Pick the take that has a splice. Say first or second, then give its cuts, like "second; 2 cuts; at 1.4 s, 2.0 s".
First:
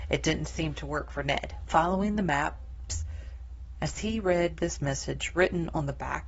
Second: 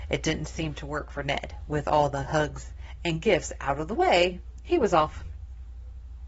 first; 2 cuts; at 1.7 s, 3.7 s